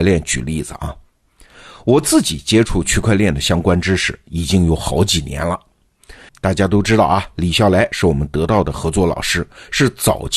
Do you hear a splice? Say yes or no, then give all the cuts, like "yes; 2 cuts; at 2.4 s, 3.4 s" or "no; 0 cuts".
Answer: yes; 1 cut; at 6.3 s